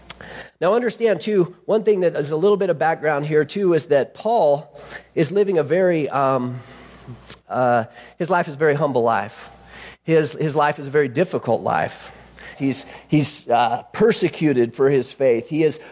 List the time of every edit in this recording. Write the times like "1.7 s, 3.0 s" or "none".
12.6 s